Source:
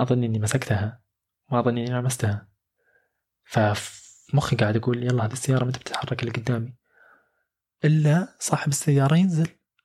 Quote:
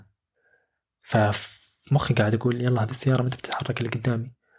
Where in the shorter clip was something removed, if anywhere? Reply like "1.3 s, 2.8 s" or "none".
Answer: none